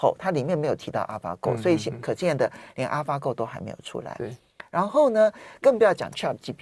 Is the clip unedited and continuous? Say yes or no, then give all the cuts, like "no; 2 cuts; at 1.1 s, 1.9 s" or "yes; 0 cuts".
yes; 0 cuts